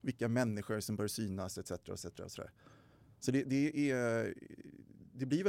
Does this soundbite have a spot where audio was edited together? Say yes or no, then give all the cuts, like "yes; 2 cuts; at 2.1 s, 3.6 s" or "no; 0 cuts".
no; 0 cuts